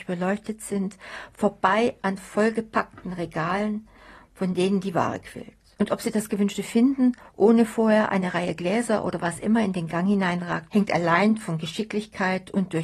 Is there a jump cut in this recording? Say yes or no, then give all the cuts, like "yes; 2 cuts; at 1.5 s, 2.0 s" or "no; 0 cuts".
yes; 1 cut; at 10.7 s